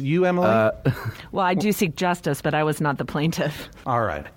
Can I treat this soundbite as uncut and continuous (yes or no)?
yes